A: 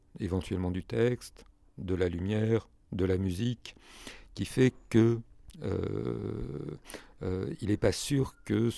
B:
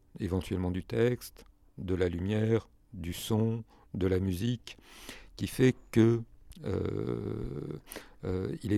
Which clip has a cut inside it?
A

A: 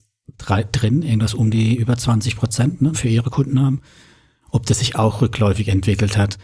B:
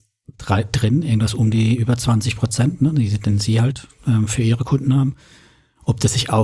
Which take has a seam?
A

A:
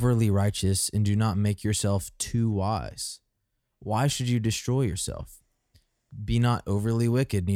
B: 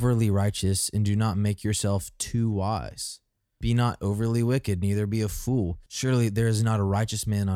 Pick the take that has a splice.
B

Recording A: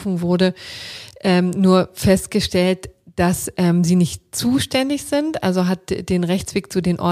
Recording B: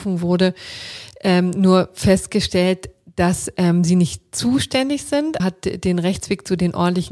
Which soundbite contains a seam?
B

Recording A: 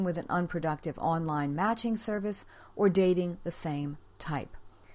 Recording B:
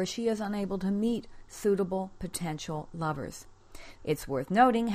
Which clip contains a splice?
B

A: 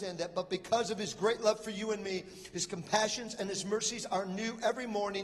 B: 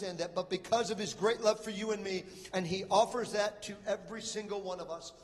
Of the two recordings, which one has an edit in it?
B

